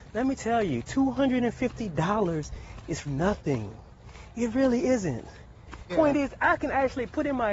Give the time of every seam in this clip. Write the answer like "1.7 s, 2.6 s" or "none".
3.0 s, 5.9 s